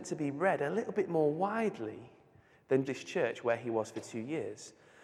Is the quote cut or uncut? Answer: cut